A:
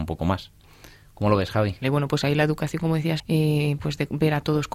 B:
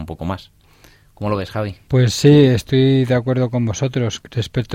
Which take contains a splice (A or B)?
A